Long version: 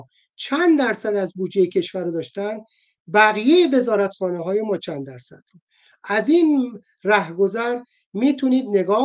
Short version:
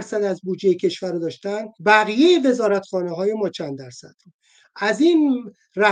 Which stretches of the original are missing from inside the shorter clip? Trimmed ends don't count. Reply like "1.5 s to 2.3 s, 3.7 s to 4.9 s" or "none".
2.7 s to 3.0 s